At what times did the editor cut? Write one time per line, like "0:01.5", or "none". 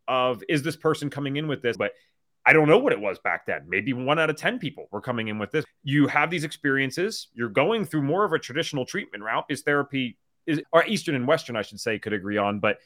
0:01.8
0:05.7
0:10.6